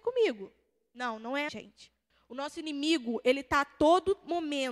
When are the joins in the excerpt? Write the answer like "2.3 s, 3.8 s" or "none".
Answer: 1.5 s